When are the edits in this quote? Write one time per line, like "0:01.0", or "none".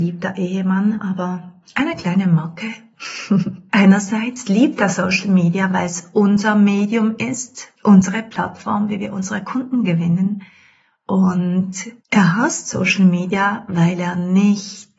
0:03.7
0:07.7
0:12.0

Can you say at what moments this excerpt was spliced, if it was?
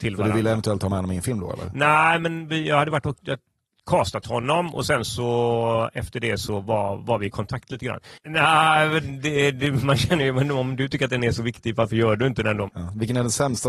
0:08.2
0:12.7

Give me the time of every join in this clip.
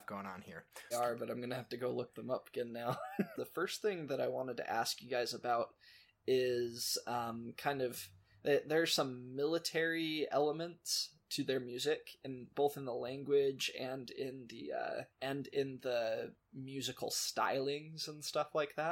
0:00.9
0:03.4
0:15.1

